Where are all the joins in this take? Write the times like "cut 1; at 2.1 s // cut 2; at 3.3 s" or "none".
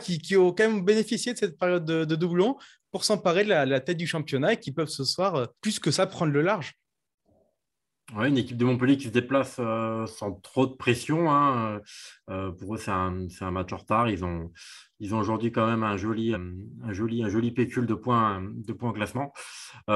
cut 1; at 5.6 s // cut 2; at 16.3 s

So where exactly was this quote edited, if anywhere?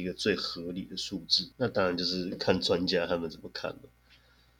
cut 1; at 1.5 s

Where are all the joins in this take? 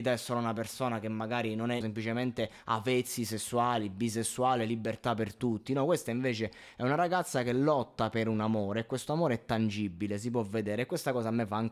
cut 1; at 1.8 s

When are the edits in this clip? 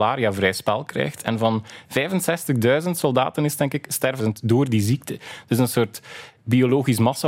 cut 1; at 4.2 s

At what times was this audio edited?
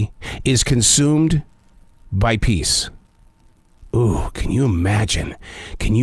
none

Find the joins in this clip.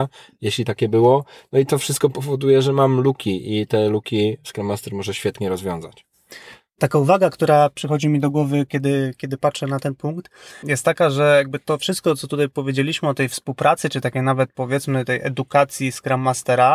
cut 1; at 10.6 s

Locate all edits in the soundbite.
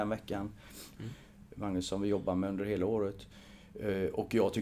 cut 1; at 1.0 s

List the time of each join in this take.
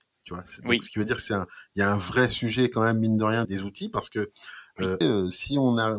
cut 1; at 3.4 s // cut 2; at 5.0 s

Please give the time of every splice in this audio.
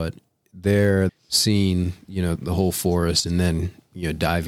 cut 1; at 1.1 s // cut 2; at 2.4 s

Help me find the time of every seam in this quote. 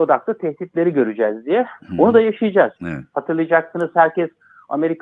cut 1; at 2.8 s

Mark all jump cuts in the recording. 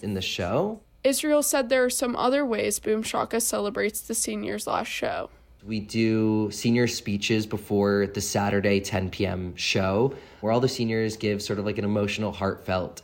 none

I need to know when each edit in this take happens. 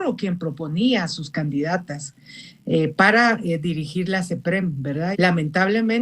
cut 1; at 5.1 s

